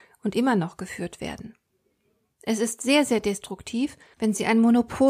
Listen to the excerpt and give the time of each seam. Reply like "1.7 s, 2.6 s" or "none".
4.1 s